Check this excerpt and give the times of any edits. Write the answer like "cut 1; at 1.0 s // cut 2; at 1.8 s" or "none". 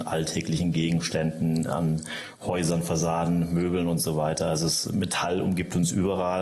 none